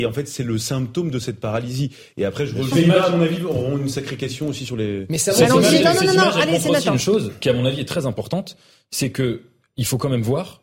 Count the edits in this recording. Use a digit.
1